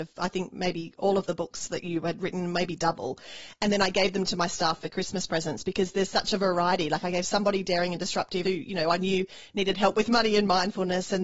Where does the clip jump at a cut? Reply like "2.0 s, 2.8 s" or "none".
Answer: 8.4 s